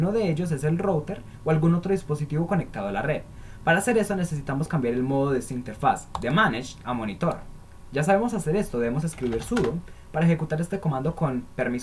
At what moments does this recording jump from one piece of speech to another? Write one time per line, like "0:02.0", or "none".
0:07.9